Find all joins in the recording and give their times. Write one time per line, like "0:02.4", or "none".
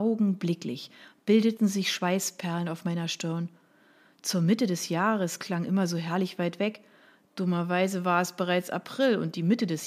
none